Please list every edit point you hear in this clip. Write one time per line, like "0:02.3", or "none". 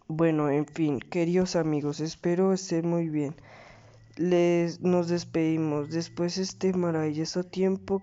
none